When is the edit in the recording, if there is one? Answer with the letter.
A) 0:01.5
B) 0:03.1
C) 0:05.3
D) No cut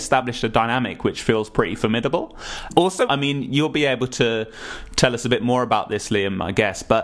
B